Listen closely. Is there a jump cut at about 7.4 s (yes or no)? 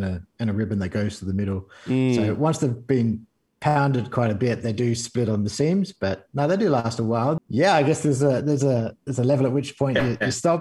yes